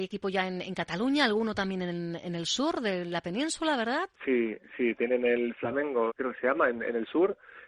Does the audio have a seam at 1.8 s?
no; 2 cuts; at 4.1 s, 6.1 s

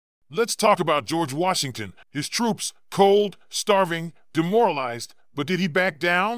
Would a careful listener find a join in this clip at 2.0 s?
yes; 1 cut; at 2.0 s

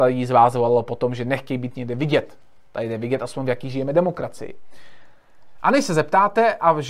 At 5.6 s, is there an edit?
yes; 1 cut; at 5.6 s

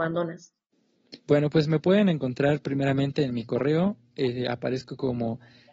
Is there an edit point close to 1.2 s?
yes; 1 cut; at 1.2 s

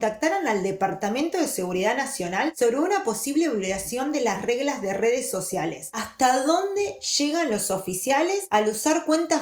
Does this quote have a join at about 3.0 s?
no; 1 cut; at 5.9 s

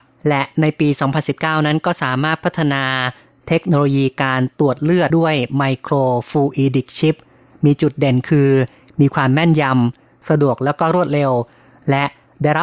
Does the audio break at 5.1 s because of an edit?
yes; 1 cut; at 5.1 s

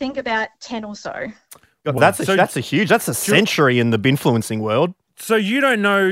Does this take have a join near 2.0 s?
yes; 1 cut; at 2.0 s

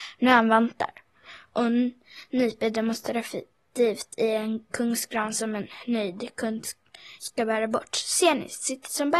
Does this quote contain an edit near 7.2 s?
yes; 1 cut; at 7.2 s

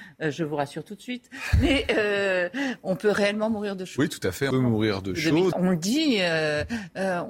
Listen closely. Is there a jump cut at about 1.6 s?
no; 2 cuts; at 4.5 s, 5.5 s

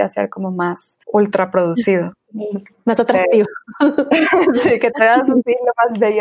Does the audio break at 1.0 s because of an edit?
yes; 1 cut; at 1.0 s

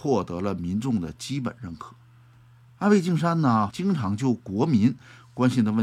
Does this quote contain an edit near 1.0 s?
no; 2 cuts; at 2.7 s, 3.7 s

